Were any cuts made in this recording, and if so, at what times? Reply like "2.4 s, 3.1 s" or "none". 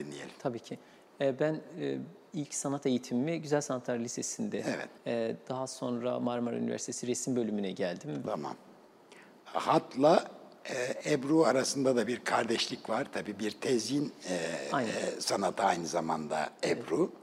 5.0 s, 8.2 s